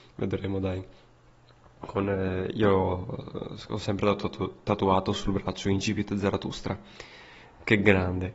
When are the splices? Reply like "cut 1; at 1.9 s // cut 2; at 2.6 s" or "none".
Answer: none